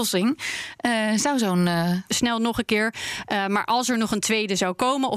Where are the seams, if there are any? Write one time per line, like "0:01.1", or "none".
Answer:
0:02.1